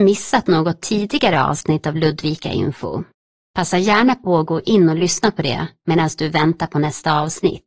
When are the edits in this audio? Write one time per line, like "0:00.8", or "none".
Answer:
none